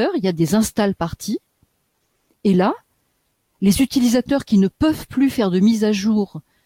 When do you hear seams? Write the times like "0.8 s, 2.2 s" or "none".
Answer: none